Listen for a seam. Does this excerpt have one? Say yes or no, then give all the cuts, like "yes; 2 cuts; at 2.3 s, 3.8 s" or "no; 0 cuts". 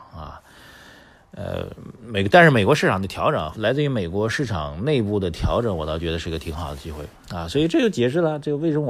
no; 0 cuts